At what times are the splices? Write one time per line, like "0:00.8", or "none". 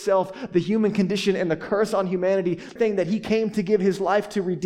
0:02.8